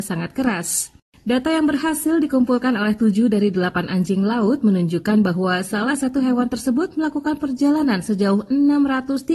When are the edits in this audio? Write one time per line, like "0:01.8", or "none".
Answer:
none